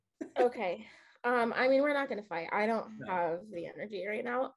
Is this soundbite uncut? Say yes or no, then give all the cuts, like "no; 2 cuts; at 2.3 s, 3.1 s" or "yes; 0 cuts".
yes; 0 cuts